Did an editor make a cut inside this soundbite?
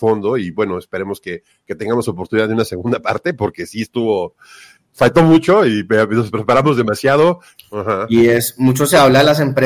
yes; 1 cut; at 7.6 s

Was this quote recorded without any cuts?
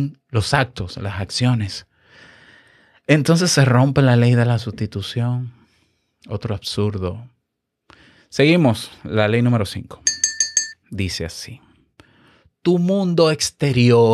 no; 1 cut; at 10.8 s

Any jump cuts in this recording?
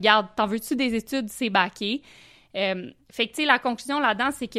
no; 0 cuts

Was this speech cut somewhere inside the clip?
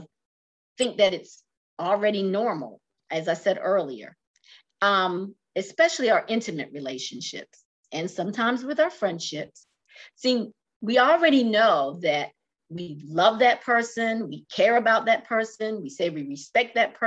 no; 0 cuts

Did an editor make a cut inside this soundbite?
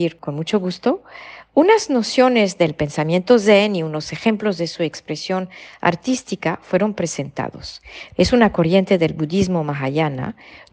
yes; 1 cut; at 8.1 s

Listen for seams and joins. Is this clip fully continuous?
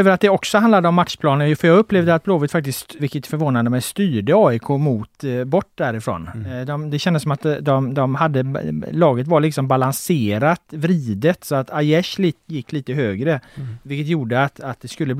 no; 1 cut; at 3.0 s

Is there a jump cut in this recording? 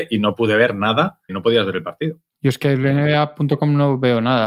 yes; 1 cut; at 1.3 s

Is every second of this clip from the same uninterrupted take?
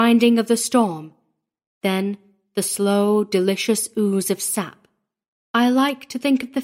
no; 1 cut; at 5.3 s

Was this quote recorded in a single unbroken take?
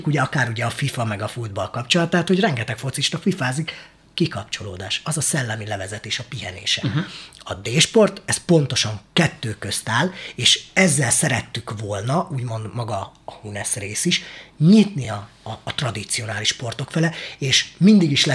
yes; 0 cuts

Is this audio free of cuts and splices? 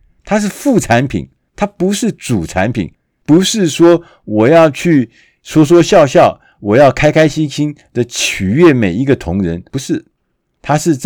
yes; 0 cuts

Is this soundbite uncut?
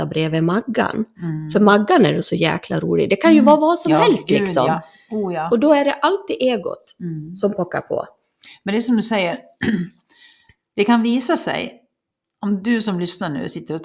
yes; 0 cuts

